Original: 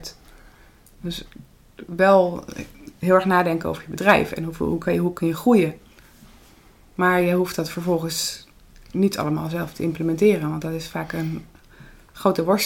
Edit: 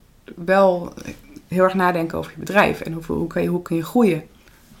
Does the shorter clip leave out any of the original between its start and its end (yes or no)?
no